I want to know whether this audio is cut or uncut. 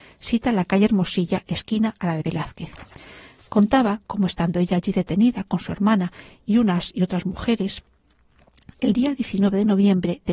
uncut